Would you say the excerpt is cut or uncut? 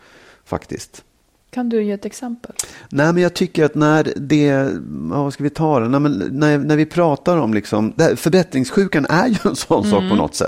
uncut